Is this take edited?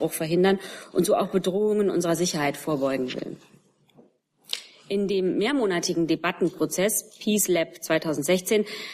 no; 0 cuts

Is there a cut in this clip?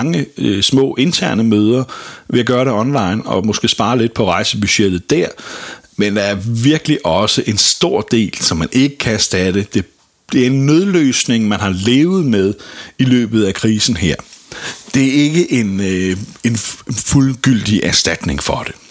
no; 0 cuts

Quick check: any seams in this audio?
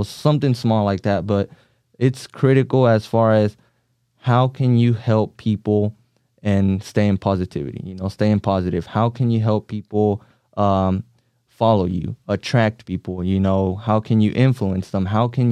no; 0 cuts

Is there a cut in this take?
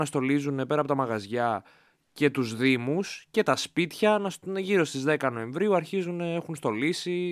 no; 0 cuts

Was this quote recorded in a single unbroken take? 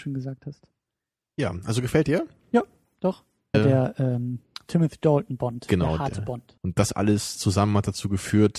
no; 2 cuts; at 3.5 s, 6.6 s

